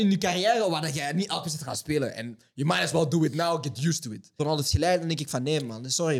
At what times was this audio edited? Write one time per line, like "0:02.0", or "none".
0:04.4